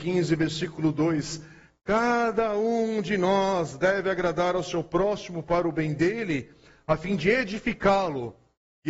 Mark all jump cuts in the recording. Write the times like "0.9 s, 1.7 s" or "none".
none